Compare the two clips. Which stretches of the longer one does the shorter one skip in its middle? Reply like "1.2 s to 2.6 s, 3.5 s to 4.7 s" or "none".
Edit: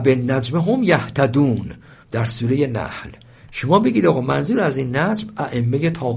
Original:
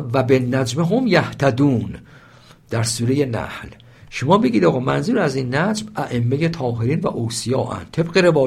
2.2 s to 2.6 s